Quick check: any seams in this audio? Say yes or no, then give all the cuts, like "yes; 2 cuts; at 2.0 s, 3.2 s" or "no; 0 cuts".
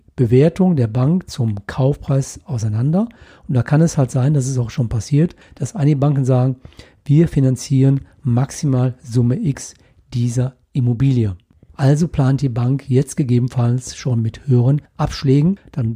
yes; 1 cut; at 11.7 s